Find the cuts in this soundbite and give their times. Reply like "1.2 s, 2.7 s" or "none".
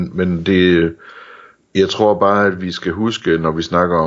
none